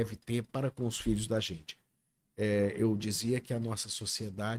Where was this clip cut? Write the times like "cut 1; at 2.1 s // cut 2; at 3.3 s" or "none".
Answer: none